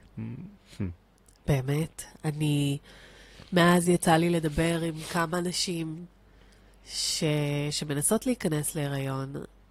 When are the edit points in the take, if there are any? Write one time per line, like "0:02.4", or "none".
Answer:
none